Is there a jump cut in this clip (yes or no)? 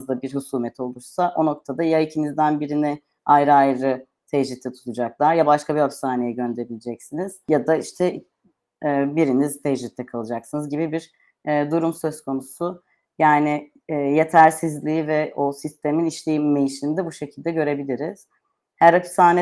no